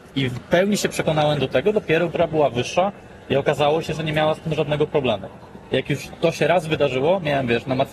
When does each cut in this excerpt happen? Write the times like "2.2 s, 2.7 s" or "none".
2.1 s

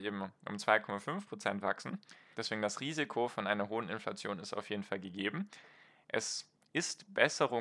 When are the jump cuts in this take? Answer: 2.3 s

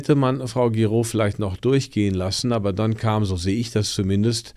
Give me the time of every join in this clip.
none

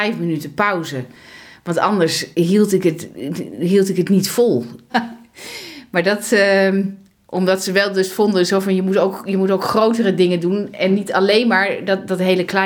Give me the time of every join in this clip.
2.3 s, 4.9 s

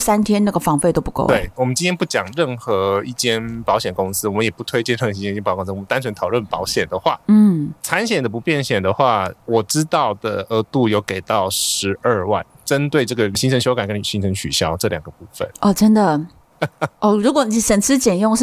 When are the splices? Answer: 1.6 s, 16.5 s

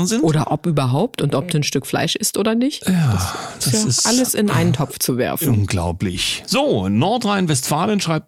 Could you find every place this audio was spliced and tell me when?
none

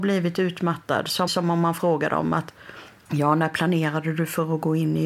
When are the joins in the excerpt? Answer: 1.3 s

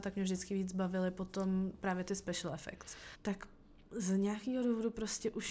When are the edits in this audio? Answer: 3.1 s

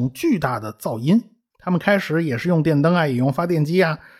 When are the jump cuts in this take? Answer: 1.5 s

